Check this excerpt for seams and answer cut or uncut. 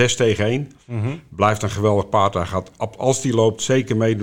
uncut